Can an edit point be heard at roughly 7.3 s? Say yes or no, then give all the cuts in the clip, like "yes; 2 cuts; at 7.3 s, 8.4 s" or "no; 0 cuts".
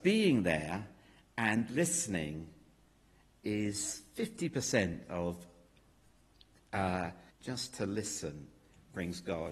yes; 1 cut; at 7.3 s